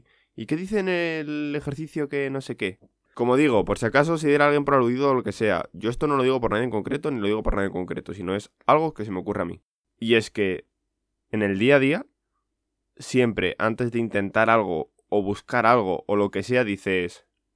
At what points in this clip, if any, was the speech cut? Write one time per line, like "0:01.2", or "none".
0:03.1
0:09.8